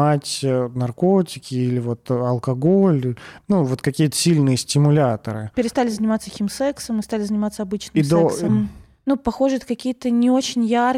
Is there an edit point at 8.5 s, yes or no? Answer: yes